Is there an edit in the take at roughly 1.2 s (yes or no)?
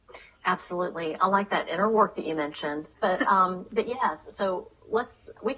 no